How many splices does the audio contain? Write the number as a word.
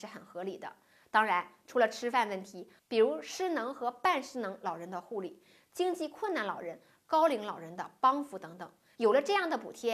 two